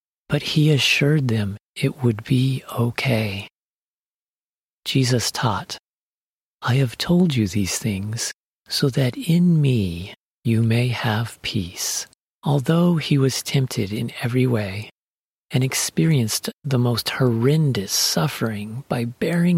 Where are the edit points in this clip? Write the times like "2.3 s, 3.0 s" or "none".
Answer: 12.2 s